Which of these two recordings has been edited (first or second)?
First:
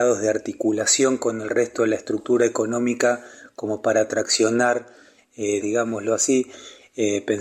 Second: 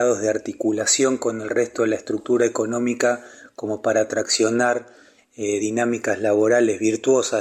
first